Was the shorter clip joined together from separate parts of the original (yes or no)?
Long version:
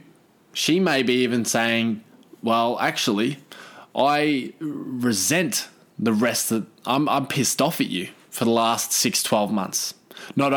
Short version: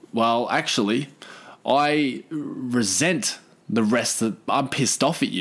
yes